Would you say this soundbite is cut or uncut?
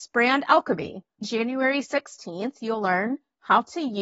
cut